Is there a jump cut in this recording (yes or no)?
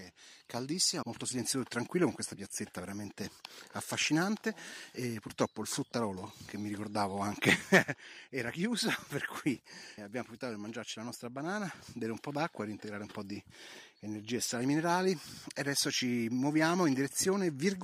yes